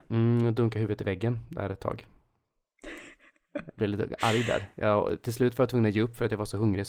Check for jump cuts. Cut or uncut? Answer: uncut